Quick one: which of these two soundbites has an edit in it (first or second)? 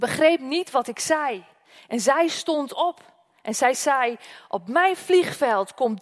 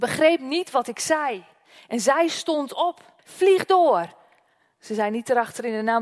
second